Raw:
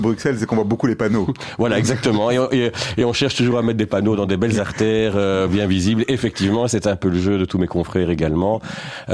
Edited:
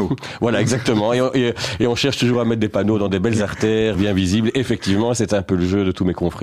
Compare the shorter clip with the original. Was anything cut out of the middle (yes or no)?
yes